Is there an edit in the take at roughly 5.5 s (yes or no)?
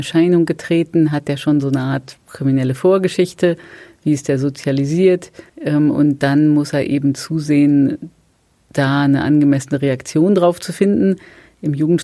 yes